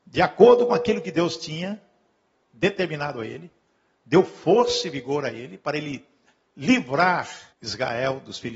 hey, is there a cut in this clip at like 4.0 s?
no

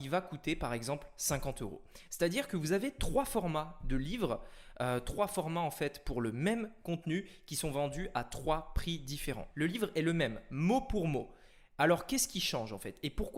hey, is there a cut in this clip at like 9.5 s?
yes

